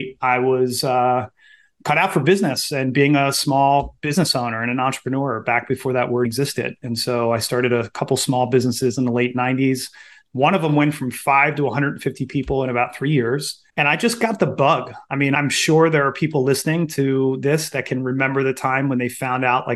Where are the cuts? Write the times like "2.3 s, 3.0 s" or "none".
6.2 s, 13.7 s